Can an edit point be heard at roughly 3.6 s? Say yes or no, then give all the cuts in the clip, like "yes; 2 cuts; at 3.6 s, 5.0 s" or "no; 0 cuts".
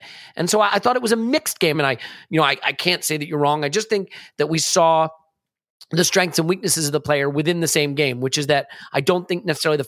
no; 1 cut; at 1.7 s